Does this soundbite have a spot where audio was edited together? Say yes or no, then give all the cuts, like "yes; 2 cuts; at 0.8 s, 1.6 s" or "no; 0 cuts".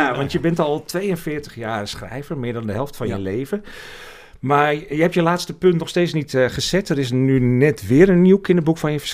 no; 0 cuts